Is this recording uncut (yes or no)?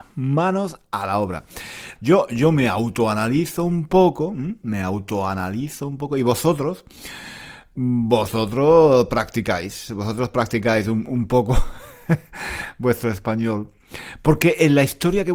no